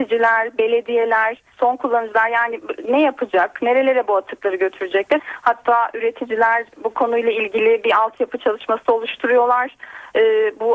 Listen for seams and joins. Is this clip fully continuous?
no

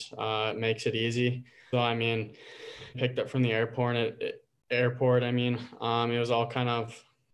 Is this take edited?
yes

